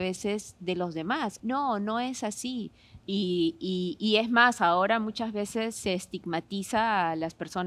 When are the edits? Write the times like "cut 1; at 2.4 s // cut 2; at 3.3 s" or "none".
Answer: cut 1; at 1.4 s // cut 2; at 3.0 s